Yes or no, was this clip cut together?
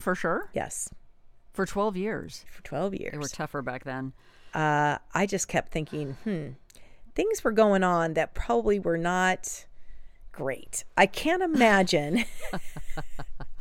no